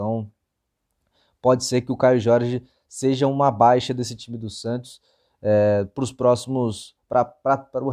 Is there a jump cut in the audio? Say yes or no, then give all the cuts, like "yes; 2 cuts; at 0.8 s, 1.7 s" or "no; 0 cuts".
no; 0 cuts